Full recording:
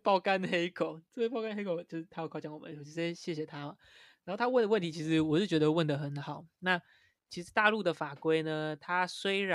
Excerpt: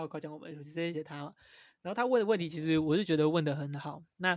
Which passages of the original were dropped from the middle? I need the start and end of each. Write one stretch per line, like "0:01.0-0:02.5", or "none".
0:03.1-0:03.4